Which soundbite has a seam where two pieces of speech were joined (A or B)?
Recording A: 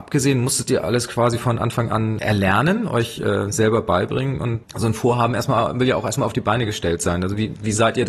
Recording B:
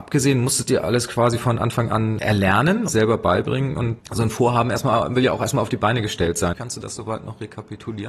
B